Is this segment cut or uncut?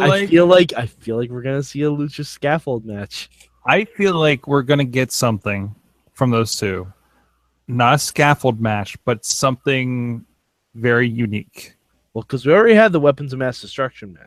uncut